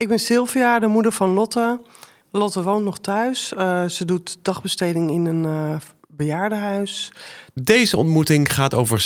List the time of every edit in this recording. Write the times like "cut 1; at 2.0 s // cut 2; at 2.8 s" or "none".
cut 1; at 2.2 s